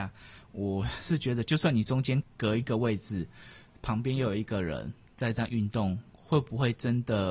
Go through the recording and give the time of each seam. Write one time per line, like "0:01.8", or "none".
0:02.2